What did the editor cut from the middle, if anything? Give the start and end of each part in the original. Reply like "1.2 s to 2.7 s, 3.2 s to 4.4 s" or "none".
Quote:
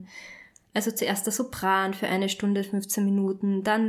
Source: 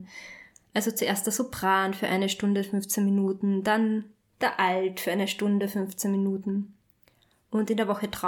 none